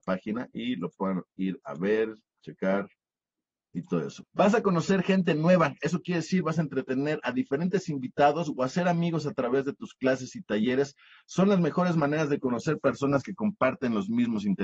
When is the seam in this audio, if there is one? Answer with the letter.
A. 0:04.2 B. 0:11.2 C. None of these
A